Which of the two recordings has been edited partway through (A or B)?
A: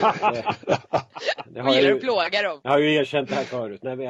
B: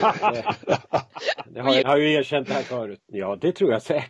B